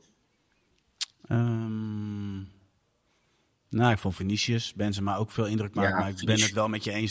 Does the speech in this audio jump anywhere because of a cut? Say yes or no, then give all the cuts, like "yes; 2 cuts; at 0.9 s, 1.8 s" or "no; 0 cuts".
no; 0 cuts